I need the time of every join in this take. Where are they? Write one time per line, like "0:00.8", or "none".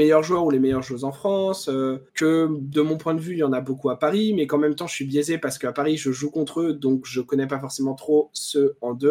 0:02.1